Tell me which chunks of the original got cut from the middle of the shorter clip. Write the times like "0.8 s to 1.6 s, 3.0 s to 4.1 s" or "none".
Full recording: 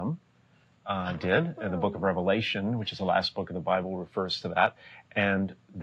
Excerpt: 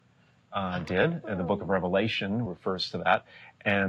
2.8 s to 4.0 s

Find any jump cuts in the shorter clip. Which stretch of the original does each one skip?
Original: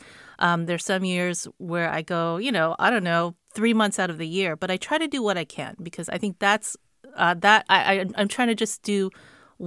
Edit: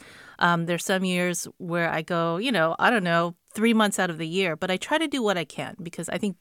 none

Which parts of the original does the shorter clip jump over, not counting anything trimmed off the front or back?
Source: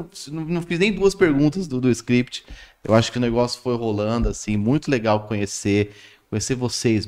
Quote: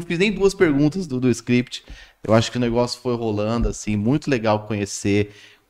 none

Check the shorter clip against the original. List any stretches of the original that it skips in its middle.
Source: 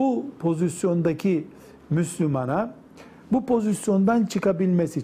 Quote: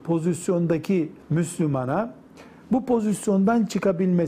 1.6 s to 1.8 s

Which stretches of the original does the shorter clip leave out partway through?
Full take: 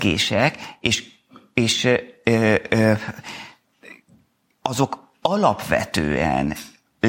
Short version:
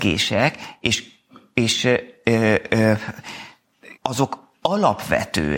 4.0 s to 4.6 s

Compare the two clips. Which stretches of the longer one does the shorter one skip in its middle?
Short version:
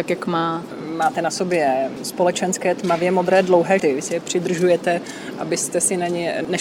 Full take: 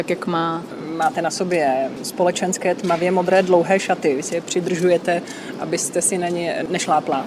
3.8 s to 4.0 s

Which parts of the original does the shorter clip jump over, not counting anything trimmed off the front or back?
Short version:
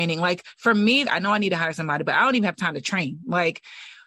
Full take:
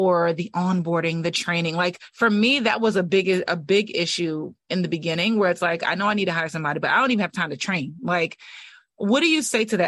2.6 s to 5.8 s

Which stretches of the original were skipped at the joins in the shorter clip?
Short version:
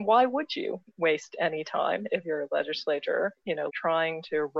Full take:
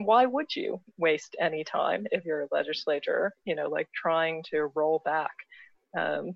3.7 s to 3.9 s

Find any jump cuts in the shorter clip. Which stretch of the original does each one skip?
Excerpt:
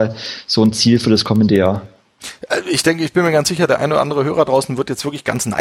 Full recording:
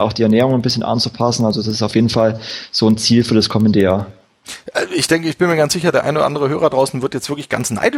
none

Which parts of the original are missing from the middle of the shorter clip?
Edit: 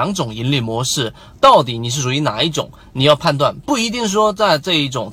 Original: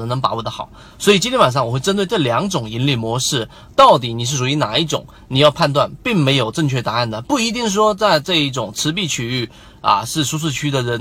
6.0 s to 7.2 s

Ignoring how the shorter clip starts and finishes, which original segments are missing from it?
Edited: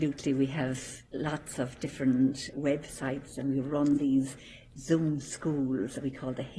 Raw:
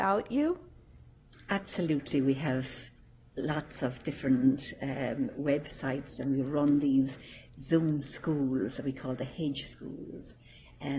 2.9 s to 3.3 s, 4.8 s to 5.3 s

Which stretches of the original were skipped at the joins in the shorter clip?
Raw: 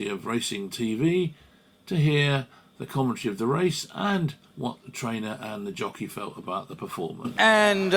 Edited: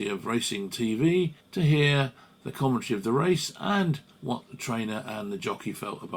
1.4 s to 1.8 s

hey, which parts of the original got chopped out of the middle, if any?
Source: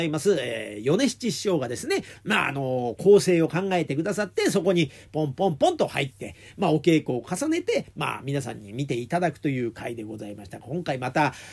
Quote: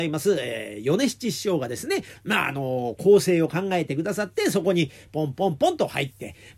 none

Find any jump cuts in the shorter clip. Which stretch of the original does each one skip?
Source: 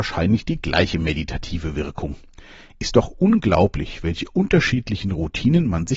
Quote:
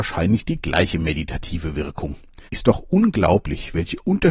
2.5 s to 2.8 s

